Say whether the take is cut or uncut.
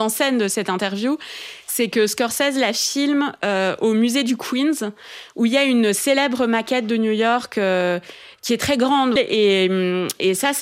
cut